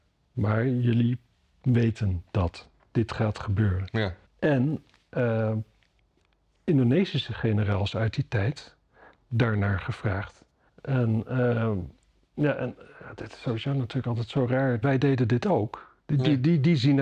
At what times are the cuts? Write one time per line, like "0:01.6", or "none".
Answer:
0:04.3
0:10.7
0:14.8